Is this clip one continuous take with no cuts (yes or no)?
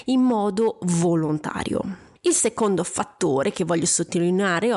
no